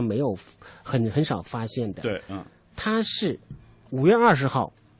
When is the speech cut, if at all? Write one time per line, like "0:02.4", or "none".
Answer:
none